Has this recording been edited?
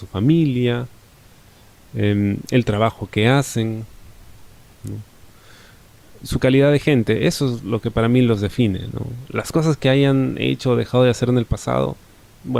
no; 0 cuts

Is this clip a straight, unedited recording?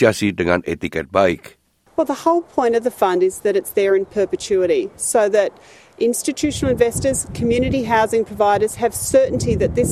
yes; 0 cuts

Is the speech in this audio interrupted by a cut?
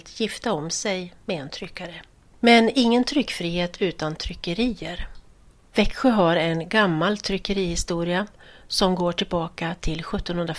yes; 1 cut; at 2.3 s

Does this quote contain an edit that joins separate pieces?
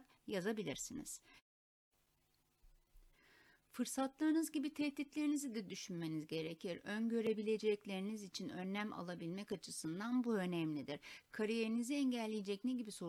no; 0 cuts

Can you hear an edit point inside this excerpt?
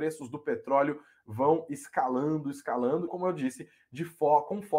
yes; 1 cut; at 3.1 s

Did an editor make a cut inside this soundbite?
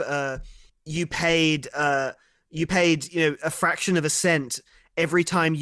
no; 0 cuts

